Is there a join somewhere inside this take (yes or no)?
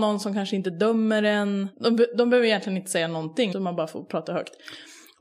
yes